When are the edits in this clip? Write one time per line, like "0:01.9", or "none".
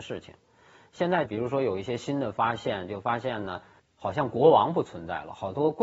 0:01.3
0:03.8